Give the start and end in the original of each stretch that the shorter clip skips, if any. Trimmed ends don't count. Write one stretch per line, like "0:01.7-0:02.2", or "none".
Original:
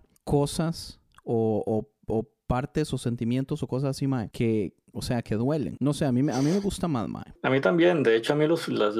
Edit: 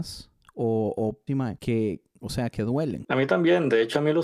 0:02.0-0:04.0
0:05.8-0:07.4